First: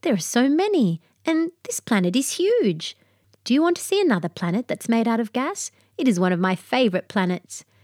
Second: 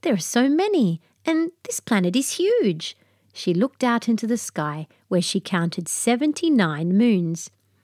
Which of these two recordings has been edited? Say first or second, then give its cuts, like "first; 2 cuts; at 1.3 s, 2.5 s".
first; 1 cut; at 3.2 s